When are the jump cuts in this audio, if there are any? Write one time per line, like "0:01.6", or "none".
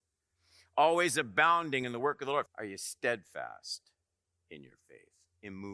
0:02.5